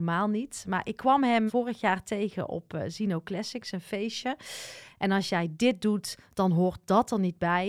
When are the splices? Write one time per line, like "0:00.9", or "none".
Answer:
0:01.5
0:04.9